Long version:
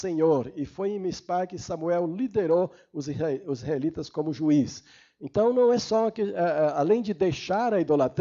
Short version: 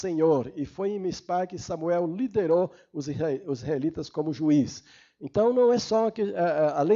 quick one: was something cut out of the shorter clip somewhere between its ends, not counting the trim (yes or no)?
no